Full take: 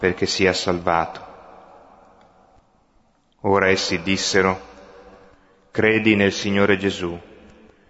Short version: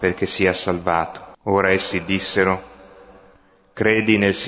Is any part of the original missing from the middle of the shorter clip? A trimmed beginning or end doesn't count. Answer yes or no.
yes